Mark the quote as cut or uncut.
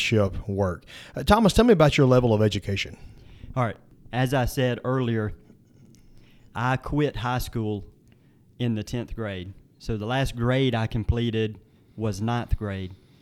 uncut